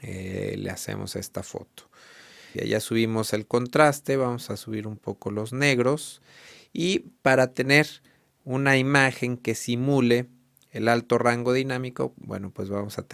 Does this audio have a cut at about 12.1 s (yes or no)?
no